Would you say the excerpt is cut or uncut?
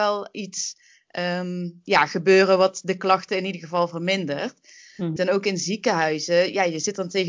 cut